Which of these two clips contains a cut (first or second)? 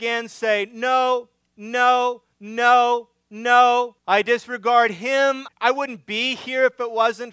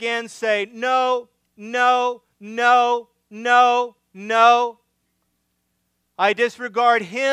first